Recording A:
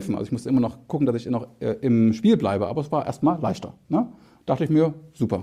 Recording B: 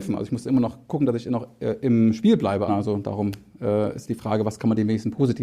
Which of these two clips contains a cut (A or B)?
B